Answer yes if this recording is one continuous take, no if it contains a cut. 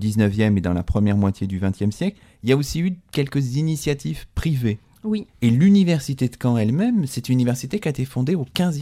no